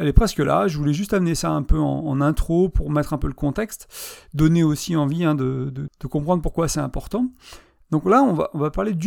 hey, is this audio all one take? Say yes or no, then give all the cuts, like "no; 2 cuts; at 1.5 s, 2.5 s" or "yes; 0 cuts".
no; 1 cut; at 5.9 s